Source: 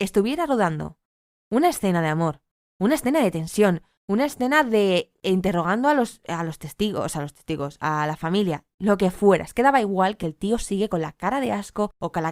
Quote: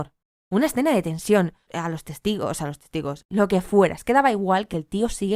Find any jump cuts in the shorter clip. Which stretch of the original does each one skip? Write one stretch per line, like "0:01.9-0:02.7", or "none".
0:04.0-0:06.2
0:07.8-0:08.7